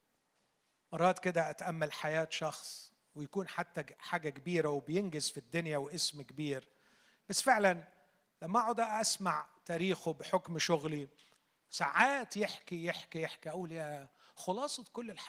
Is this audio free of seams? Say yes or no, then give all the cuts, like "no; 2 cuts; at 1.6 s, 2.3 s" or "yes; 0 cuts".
yes; 0 cuts